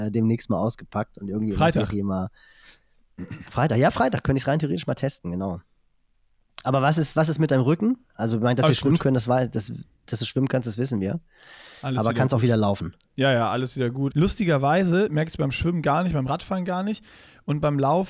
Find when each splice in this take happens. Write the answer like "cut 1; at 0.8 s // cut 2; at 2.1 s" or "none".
cut 1; at 6.6 s // cut 2; at 14.1 s